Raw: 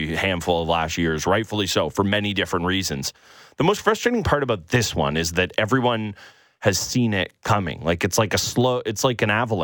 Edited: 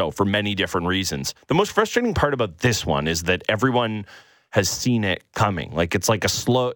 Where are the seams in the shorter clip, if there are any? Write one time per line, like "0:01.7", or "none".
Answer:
0:01.4